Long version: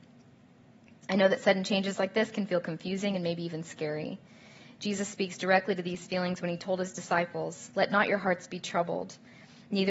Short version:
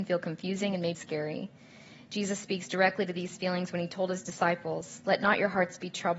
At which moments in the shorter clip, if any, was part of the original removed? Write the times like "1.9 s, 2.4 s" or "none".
0.9 s